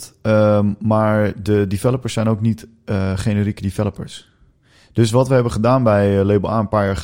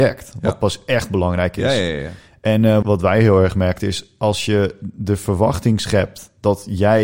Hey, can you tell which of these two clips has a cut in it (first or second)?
second